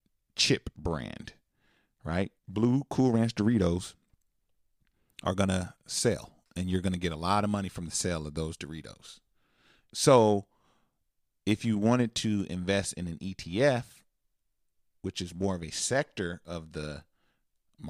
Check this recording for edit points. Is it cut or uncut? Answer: cut